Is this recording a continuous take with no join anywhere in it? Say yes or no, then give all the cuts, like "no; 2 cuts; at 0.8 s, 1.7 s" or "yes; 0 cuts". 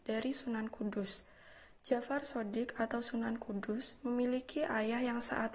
yes; 0 cuts